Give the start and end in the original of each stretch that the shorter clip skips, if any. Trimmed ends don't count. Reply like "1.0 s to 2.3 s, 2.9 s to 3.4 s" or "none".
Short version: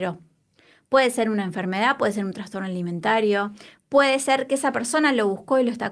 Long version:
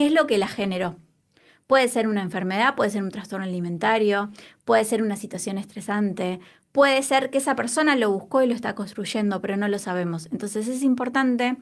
4.5 s to 6.6 s